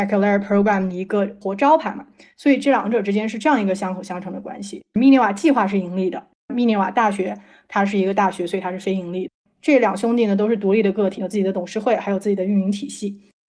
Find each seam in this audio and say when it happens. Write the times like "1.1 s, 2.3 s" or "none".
11.2 s